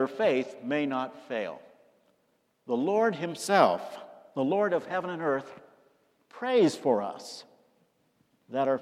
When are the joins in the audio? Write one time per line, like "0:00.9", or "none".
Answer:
none